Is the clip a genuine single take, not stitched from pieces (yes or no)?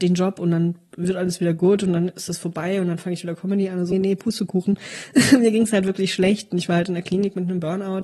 no